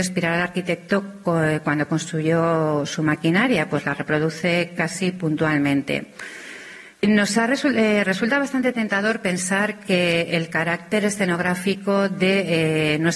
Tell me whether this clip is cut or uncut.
cut